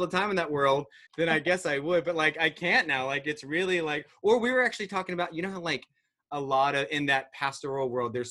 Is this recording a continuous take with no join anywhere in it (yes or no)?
no